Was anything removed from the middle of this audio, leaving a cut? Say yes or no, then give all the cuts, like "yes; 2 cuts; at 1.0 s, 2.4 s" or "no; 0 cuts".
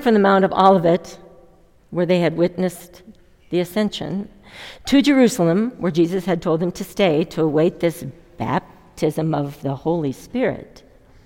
no; 0 cuts